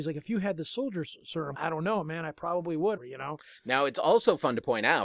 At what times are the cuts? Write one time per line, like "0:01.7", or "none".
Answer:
0:01.5
0:03.0